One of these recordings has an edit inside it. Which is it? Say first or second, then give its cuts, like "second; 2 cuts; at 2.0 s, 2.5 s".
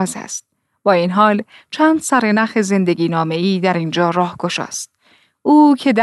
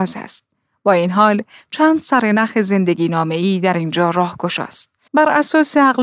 second; 1 cut; at 5.1 s